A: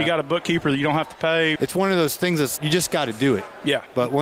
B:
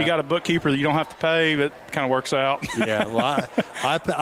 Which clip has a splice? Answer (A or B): A